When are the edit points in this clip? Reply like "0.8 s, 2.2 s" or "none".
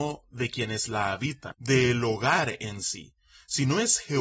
1.5 s